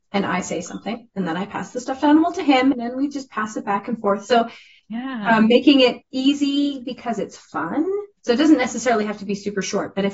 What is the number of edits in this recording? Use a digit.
1